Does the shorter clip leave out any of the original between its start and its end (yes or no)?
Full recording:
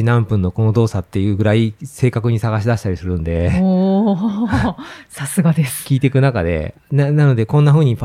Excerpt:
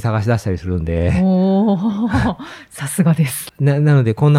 yes